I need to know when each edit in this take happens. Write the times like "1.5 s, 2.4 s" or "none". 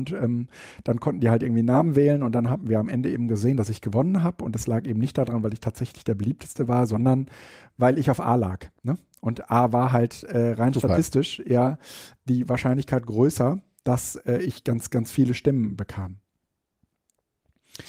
none